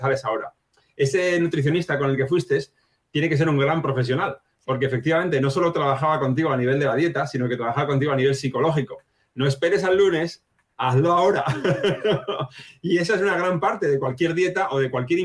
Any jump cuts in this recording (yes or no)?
no